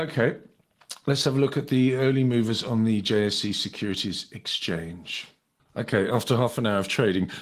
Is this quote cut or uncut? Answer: uncut